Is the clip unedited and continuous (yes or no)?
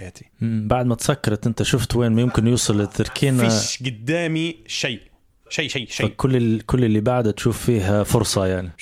no